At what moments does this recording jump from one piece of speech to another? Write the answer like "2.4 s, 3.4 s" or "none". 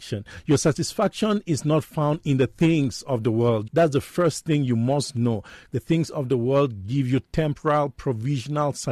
3.7 s, 5.7 s